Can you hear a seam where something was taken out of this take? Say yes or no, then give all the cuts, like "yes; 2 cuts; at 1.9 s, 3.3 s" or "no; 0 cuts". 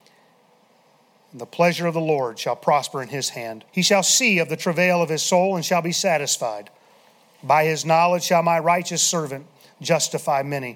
yes; 1 cut; at 3.7 s